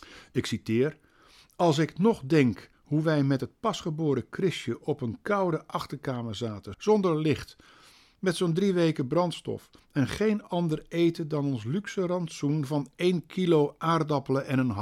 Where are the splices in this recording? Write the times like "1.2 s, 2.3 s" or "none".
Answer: 6.7 s